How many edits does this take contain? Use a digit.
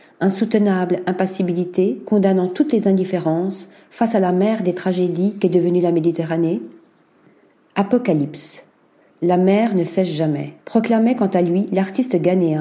2